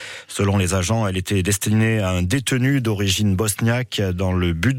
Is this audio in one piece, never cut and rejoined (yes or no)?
yes